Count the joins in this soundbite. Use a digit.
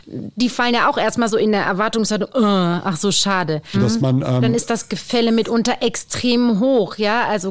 1